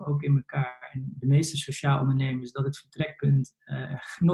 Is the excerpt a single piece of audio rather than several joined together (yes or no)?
yes